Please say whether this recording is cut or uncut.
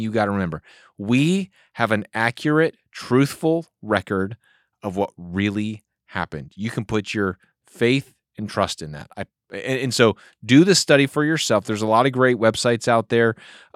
uncut